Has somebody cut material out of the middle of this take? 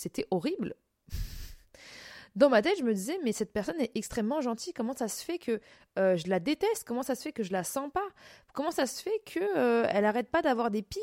no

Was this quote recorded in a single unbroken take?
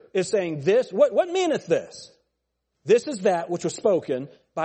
yes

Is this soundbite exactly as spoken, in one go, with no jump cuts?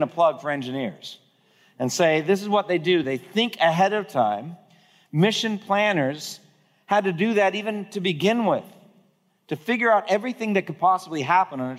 yes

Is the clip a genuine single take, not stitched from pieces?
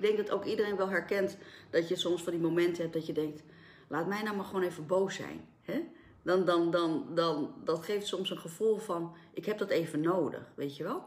yes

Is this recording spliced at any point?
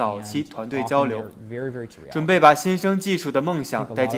yes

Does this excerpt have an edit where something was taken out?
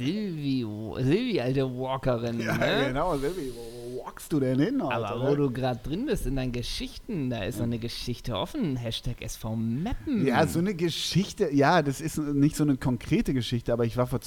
no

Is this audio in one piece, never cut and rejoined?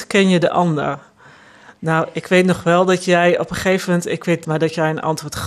no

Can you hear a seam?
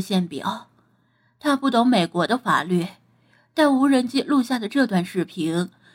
no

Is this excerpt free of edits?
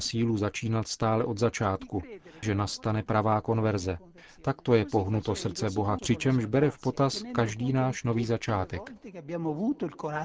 no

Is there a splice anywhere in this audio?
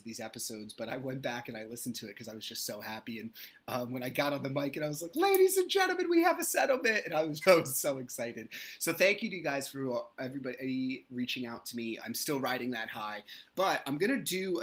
yes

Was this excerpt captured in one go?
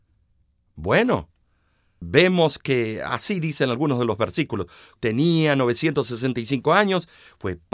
no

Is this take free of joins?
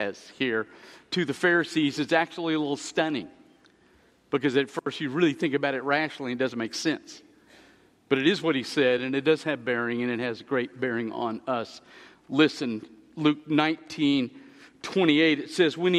yes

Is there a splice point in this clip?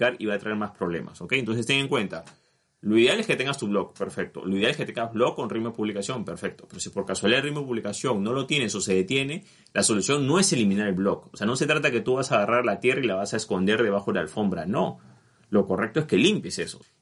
no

